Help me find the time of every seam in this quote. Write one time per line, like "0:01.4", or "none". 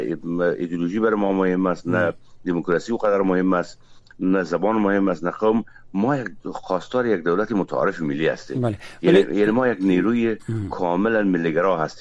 none